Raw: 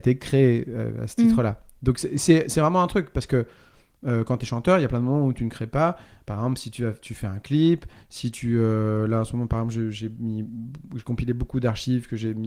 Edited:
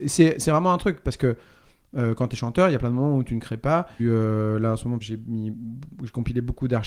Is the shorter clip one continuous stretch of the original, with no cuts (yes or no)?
no